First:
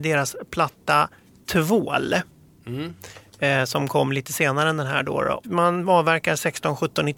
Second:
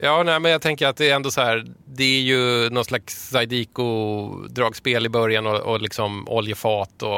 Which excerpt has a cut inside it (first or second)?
first